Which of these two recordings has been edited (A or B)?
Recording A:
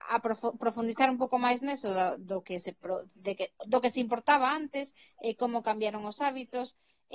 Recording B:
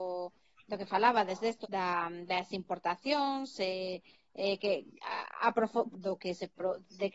B